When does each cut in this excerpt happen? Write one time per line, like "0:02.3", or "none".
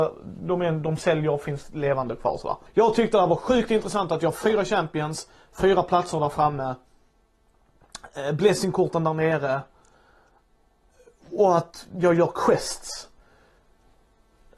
0:02.7